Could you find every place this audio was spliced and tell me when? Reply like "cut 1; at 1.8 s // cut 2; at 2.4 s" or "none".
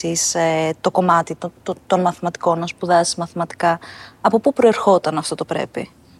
none